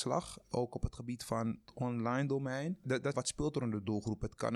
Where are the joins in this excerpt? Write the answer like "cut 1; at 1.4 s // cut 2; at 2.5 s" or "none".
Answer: cut 1; at 3.1 s